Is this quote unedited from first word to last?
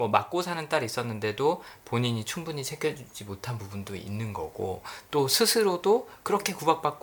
yes; 0 cuts

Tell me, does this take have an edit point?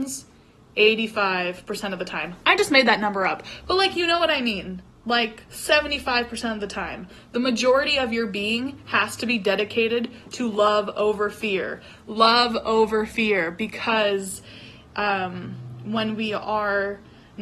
no; 0 cuts

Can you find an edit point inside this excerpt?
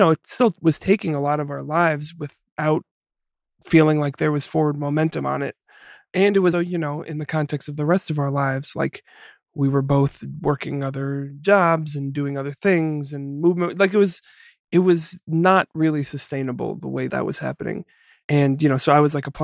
yes; 2 cuts; at 6.5 s, 17.1 s

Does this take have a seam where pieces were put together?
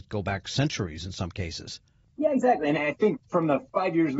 no; 0 cuts

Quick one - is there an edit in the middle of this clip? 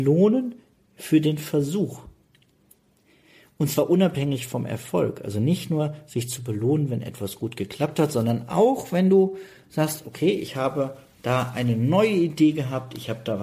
no; 0 cuts

